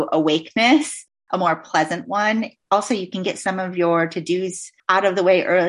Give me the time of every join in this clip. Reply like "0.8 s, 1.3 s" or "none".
none

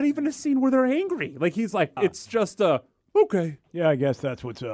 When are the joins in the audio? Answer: 2.0 s

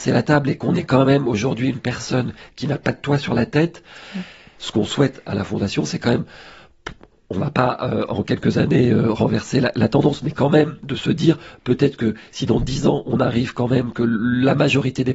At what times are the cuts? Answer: 4.5 s

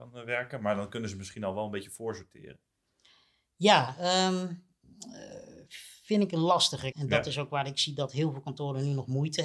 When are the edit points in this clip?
6.9 s

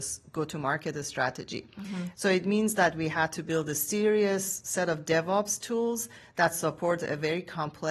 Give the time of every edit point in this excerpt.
2.1 s

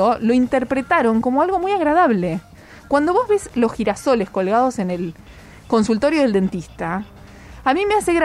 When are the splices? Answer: none

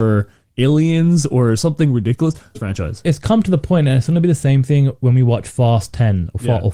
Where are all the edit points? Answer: 2.5 s

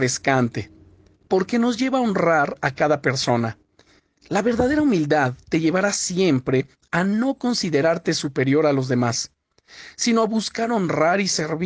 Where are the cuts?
none

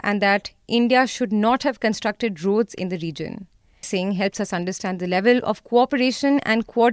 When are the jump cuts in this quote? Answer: 3.8 s

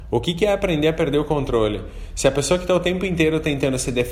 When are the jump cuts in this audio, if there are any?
none

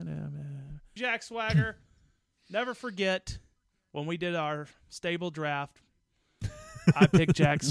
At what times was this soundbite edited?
1.0 s

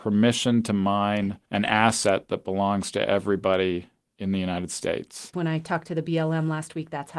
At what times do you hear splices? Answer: 1.5 s, 5.3 s

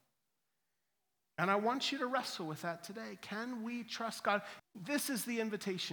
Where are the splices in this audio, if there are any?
4.6 s

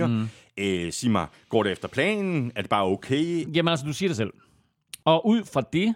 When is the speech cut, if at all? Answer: 3.5 s, 5.0 s

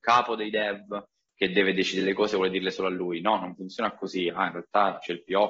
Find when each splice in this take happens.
none

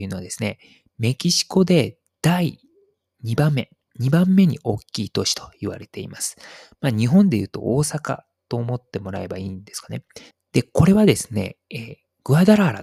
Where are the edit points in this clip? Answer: 10.3 s

